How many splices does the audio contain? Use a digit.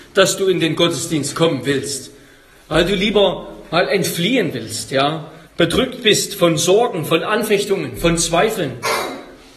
1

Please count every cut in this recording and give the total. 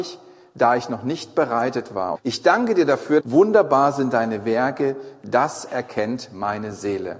2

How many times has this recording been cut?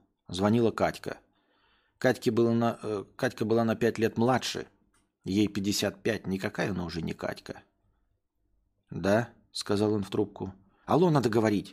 1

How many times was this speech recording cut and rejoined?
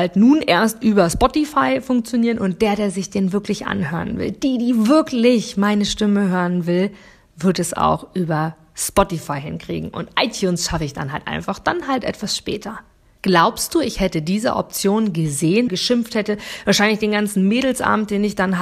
2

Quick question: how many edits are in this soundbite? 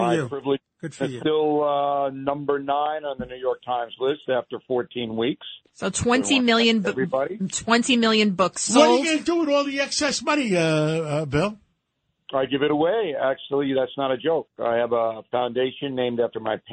1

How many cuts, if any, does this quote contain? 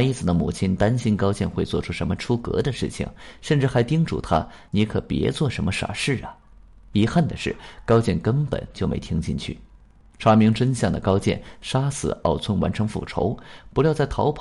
1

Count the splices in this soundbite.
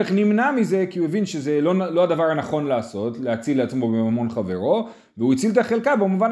0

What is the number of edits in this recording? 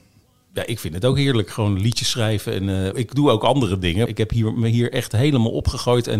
2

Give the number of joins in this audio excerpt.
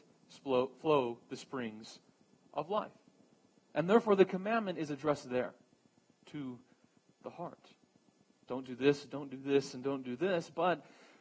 2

